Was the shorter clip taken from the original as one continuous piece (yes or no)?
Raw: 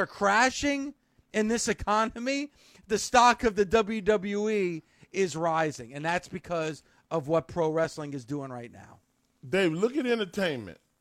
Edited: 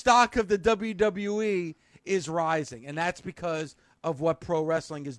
yes